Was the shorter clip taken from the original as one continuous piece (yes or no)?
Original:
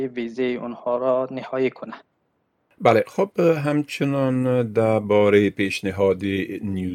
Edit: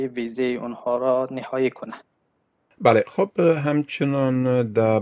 yes